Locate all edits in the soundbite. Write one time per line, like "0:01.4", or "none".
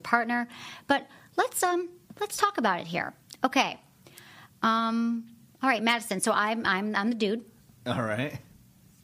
none